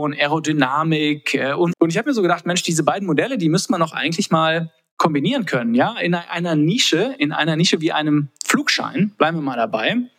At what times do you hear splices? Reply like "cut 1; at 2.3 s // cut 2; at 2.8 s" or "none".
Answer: cut 1; at 1.7 s